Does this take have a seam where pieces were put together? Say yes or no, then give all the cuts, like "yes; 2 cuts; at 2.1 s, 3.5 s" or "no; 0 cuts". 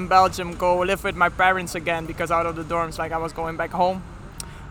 no; 0 cuts